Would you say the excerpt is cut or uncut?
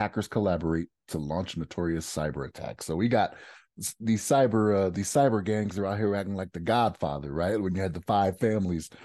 uncut